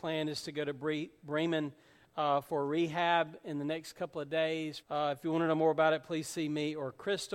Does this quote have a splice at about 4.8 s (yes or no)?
yes